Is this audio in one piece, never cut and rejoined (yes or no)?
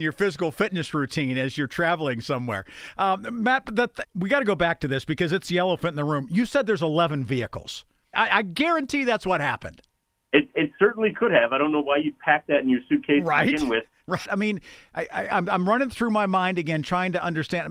no